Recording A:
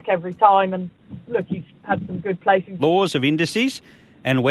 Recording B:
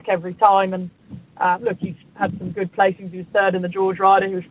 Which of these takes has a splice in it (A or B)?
A